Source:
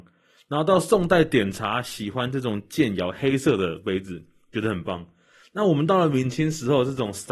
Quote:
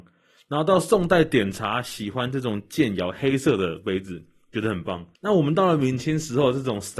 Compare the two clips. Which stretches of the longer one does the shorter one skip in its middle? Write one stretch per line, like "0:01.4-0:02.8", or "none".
0:05.2-0:05.5